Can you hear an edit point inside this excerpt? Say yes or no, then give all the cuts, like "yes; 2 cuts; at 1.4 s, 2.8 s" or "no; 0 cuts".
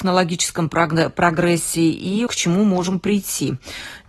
yes; 1 cut; at 2.3 s